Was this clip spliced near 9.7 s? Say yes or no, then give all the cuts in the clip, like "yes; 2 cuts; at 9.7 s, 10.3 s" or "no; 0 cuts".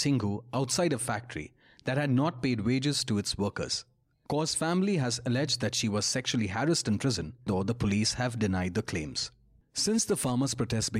no; 1 cut; at 7.5 s